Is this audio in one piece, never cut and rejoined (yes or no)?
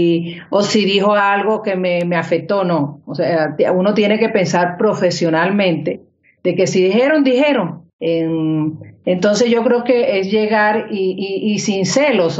no